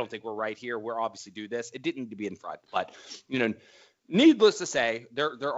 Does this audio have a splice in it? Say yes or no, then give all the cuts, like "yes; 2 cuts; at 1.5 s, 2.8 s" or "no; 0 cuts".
no; 0 cuts